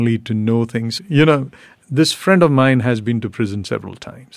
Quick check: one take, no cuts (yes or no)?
no